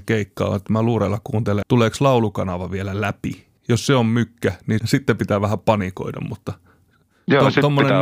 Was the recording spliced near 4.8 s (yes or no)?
yes